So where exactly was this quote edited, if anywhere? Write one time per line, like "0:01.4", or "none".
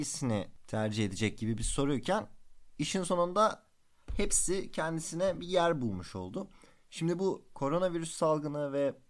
none